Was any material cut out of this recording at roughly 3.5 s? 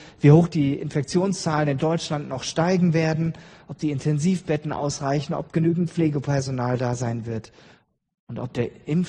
no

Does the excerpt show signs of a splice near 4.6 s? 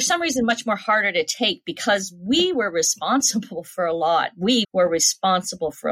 yes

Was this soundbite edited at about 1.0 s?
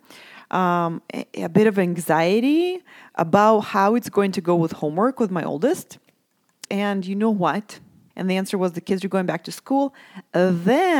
no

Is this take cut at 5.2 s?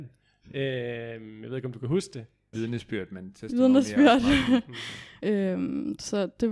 yes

